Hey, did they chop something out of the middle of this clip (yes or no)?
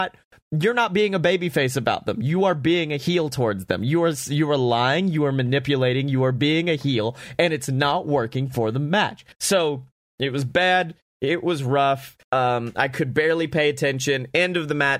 yes